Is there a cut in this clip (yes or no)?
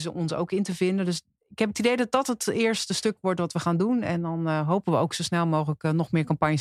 no